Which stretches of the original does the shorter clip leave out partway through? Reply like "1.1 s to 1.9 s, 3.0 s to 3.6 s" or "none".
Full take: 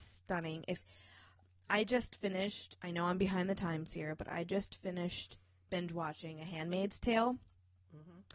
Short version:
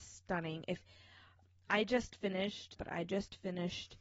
2.8 s to 4.2 s